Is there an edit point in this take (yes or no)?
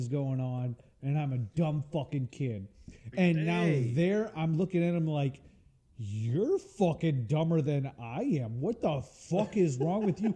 yes